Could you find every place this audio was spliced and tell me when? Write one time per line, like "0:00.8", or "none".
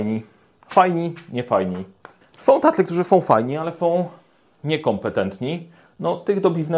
0:02.2